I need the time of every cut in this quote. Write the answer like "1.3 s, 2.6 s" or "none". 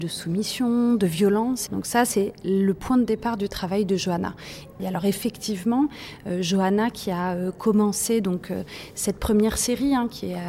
1.7 s, 4.8 s